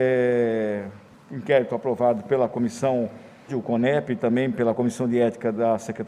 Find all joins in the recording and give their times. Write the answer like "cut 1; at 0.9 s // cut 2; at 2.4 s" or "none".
cut 1; at 3.5 s

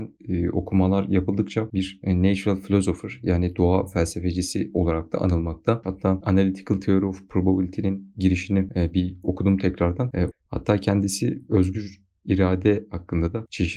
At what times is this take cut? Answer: cut 1; at 5.8 s // cut 2; at 10.3 s

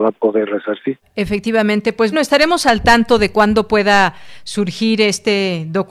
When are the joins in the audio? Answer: cut 1; at 1.0 s // cut 2; at 2.1 s

